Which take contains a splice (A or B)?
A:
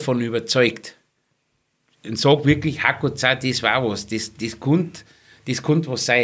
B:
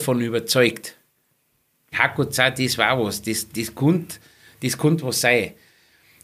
B